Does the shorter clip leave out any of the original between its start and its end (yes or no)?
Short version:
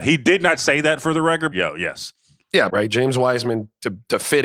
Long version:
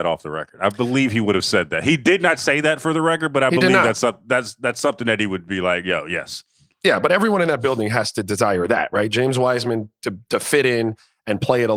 yes